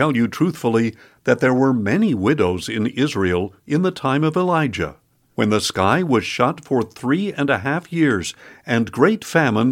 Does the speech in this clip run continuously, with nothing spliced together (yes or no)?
yes